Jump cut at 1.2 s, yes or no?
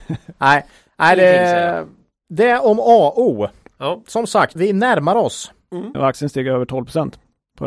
no